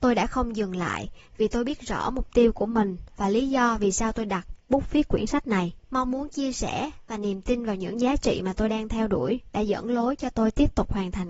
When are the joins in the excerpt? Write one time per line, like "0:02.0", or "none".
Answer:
0:05.8